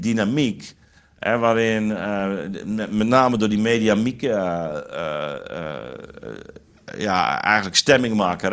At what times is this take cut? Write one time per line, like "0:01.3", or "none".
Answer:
none